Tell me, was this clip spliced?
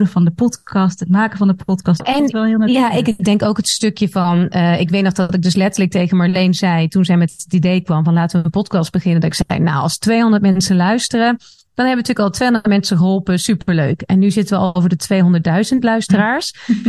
yes; 1 cut; at 2.0 s

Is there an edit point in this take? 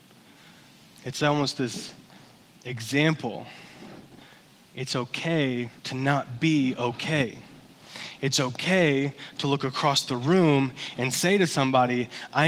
yes; 1 cut; at 5.8 s

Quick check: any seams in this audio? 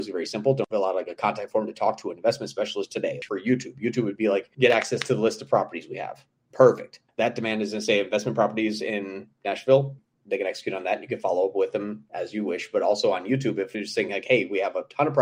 no; 0 cuts

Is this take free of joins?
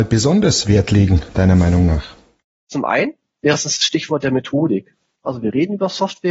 no; 2 cuts; at 2.6 s, 5.2 s

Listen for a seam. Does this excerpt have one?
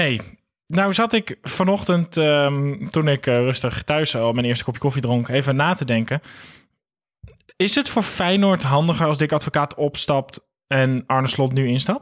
no; 0 cuts

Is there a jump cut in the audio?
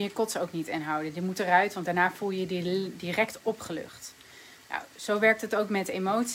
no; 0 cuts

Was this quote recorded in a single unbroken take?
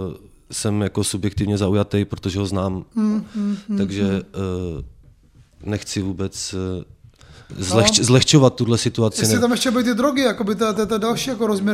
yes; 0 cuts

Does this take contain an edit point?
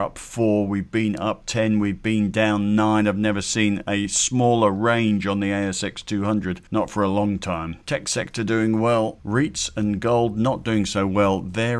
yes; 1 cut; at 6.7 s

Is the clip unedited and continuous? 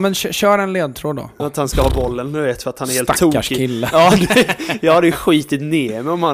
no; 1 cut; at 1.4 s

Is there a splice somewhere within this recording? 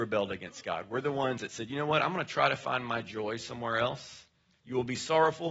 yes; 1 cut; at 4.6 s

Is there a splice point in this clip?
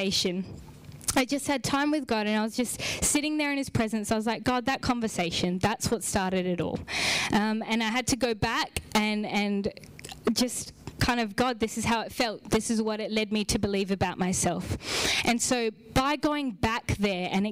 no; 0 cuts

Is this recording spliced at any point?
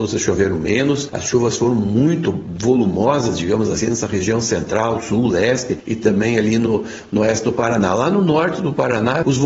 no; 0 cuts

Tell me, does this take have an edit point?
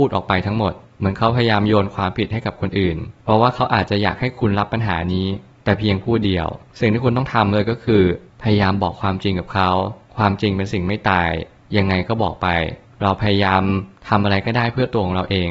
no; 0 cuts

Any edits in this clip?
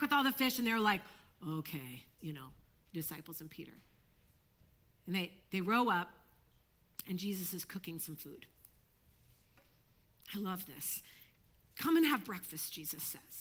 yes; 1 cut; at 2.2 s

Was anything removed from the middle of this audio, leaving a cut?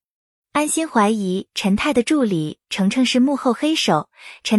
no; 0 cuts

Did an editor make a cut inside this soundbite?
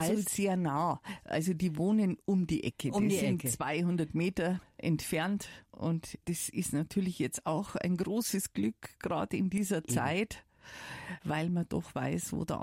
no; 0 cuts

